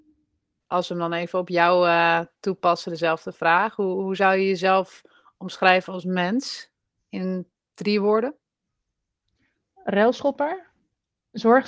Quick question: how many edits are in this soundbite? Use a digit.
0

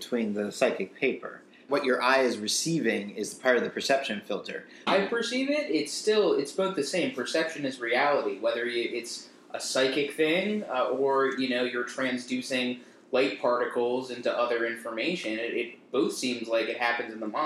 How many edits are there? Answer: 2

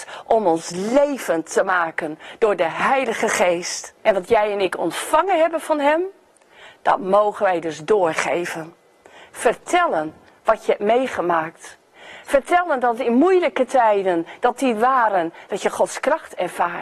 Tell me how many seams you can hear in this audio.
1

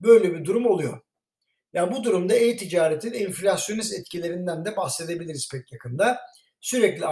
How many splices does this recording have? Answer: 0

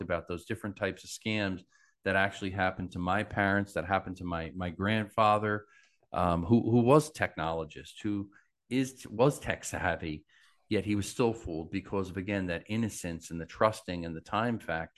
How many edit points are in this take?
0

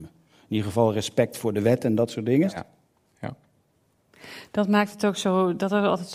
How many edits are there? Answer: 1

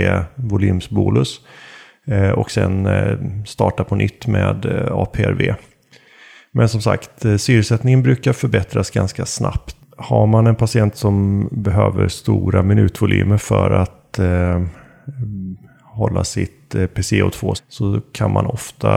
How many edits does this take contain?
2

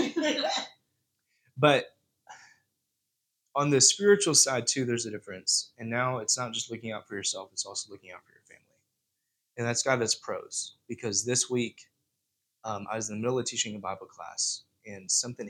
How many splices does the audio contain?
0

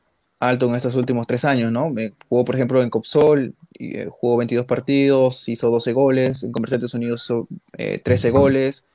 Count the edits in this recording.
0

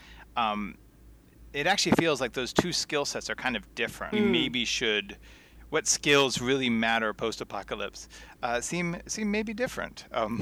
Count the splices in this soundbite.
1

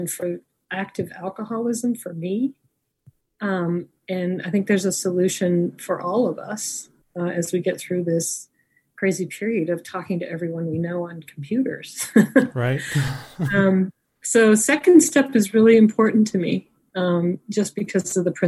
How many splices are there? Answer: 0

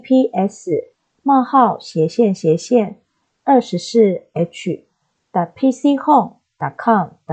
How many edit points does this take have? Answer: 0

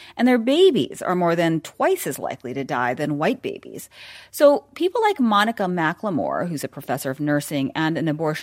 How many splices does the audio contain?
0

